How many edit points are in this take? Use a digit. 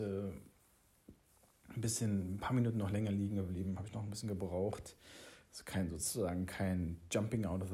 0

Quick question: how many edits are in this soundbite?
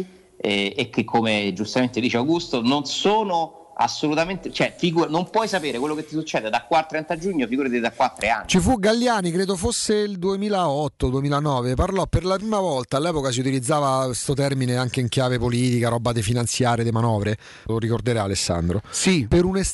1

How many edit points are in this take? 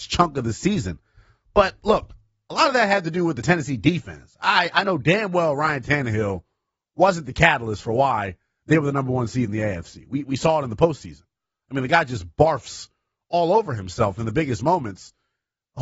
0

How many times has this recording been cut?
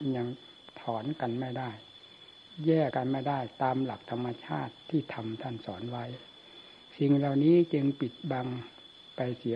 1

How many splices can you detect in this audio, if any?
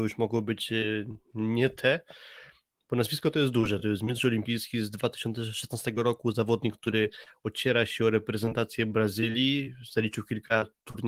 0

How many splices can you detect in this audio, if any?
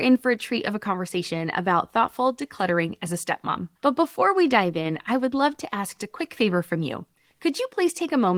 2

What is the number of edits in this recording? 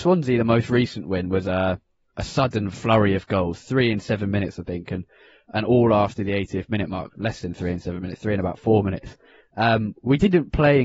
0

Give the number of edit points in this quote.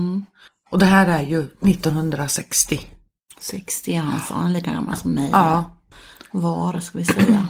0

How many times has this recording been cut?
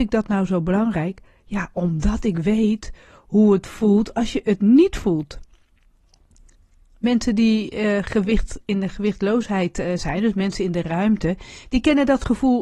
0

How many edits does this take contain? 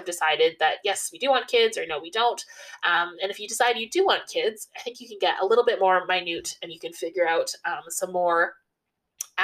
0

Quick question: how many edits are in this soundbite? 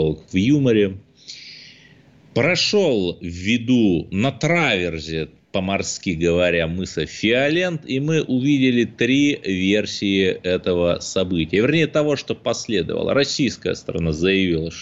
0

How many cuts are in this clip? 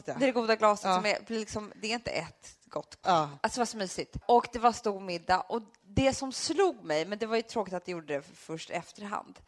1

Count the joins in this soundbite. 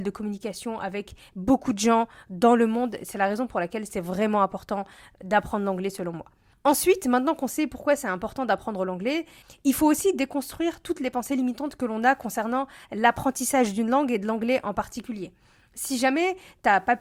0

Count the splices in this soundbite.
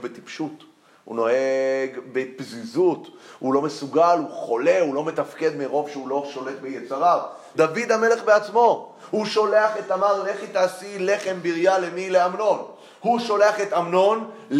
1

